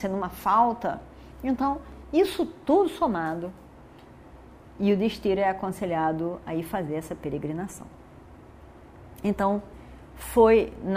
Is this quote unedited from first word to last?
yes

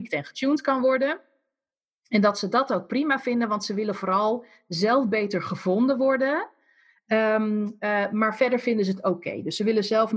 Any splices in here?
no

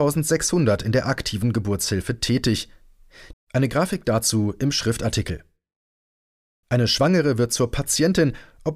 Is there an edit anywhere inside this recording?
yes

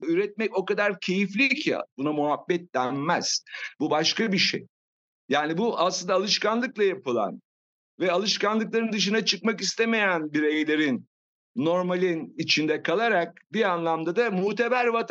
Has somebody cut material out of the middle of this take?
yes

